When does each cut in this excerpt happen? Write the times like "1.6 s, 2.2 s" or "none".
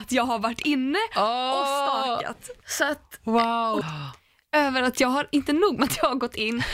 2.6 s, 3.8 s